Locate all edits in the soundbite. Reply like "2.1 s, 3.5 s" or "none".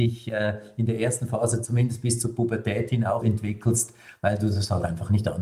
3.2 s